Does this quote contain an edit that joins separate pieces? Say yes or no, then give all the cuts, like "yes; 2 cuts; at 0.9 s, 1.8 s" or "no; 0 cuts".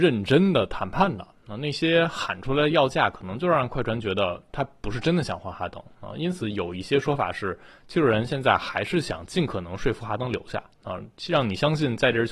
no; 0 cuts